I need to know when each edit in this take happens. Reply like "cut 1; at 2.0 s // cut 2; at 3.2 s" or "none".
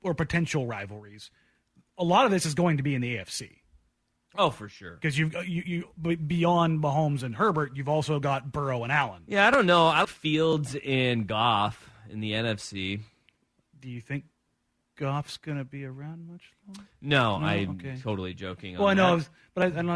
cut 1; at 10.0 s